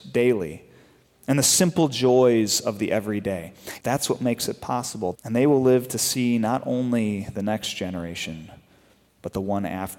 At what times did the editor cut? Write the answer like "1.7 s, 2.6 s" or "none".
3.8 s, 5.1 s